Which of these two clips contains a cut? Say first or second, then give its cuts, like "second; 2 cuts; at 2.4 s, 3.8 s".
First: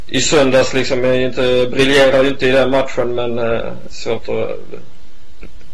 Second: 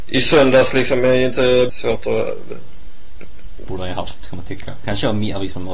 second; 3 cuts; at 1.7 s, 3.7 s, 4.8 s